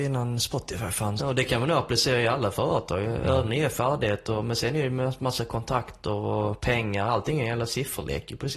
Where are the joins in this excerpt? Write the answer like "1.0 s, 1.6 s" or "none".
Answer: 1.2 s

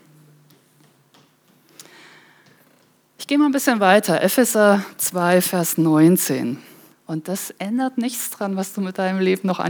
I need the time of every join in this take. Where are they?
6.9 s

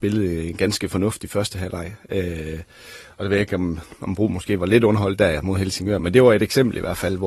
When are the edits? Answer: none

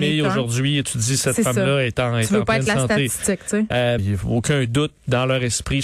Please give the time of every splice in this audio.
4.0 s

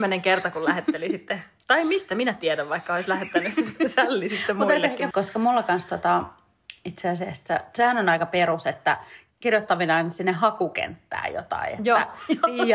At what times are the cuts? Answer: 5.1 s

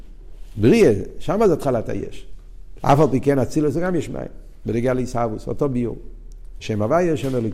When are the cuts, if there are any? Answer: 2.8 s, 4.6 s, 6.6 s

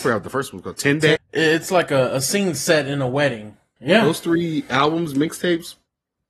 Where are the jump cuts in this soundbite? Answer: 1.2 s, 3.8 s

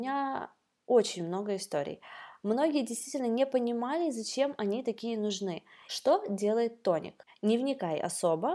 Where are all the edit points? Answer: 5.9 s, 7.3 s

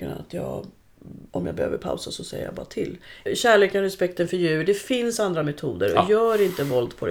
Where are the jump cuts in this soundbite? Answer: 1.3 s, 3.3 s

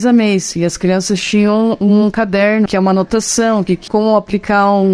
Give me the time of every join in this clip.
2.7 s, 3.9 s

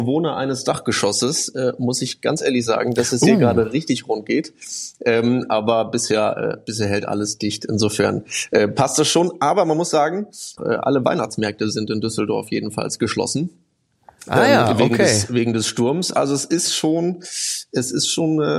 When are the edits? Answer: 10.6 s

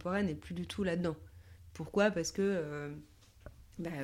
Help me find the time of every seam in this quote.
none

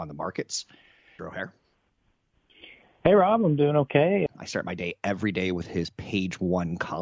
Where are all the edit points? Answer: 1.2 s, 4.3 s

